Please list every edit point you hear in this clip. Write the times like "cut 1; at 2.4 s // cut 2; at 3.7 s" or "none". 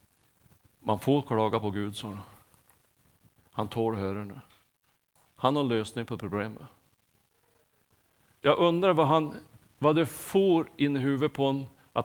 cut 1; at 5.2 s // cut 2; at 8.4 s